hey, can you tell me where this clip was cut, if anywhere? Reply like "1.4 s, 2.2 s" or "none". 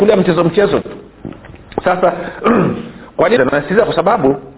3.4 s

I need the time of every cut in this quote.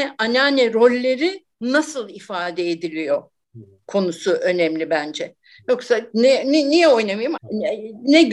1.5 s, 7.4 s

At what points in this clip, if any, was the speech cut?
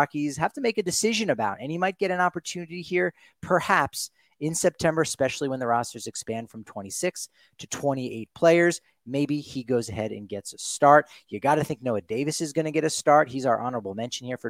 none

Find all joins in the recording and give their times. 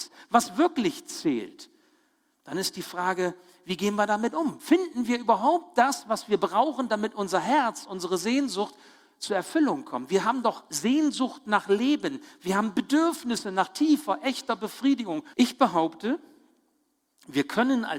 15.3 s

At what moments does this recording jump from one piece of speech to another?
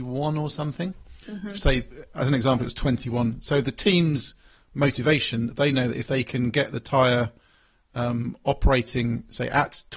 none

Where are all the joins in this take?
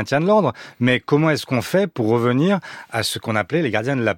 none

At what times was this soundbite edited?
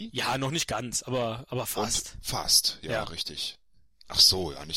none

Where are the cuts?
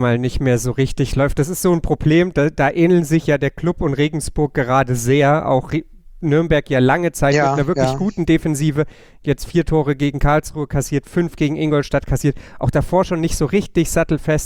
none

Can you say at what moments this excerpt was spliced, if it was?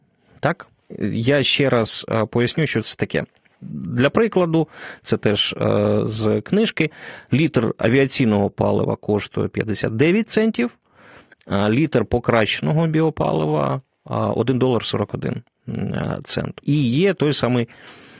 3.5 s, 16.6 s

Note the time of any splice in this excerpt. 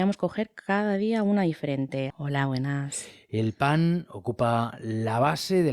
2.1 s

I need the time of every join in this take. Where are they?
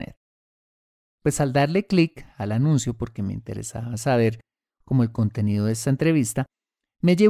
1.1 s

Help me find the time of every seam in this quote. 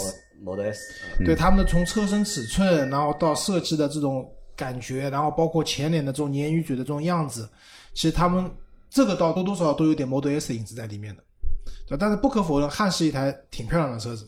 9.4 s

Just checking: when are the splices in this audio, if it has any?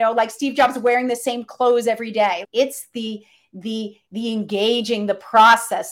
2.4 s

